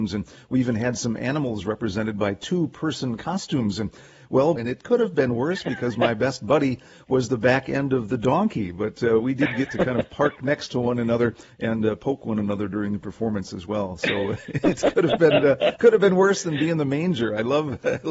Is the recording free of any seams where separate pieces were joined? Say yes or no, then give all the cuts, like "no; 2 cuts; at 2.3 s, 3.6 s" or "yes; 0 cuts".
no; 1 cut; at 4.6 s